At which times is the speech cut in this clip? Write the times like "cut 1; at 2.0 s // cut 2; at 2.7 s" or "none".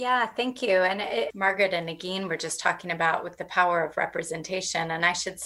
cut 1; at 1.3 s